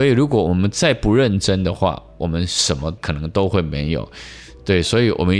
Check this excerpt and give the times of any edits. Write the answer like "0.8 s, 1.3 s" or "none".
none